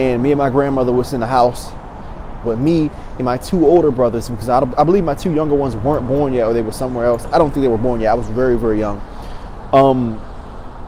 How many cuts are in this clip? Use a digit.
1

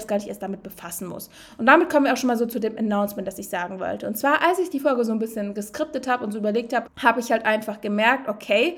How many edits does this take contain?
1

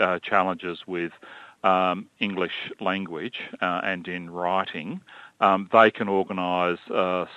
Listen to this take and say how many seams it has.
0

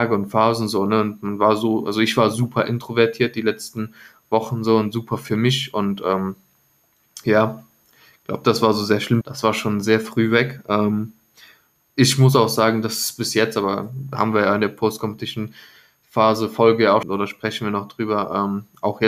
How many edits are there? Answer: 2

